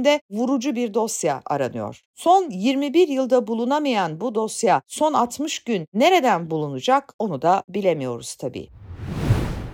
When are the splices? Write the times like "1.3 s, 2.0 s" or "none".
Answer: none

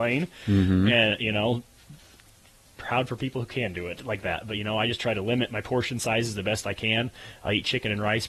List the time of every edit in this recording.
none

